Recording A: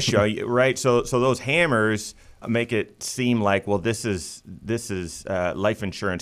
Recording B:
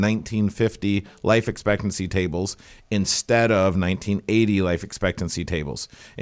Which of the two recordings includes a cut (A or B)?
A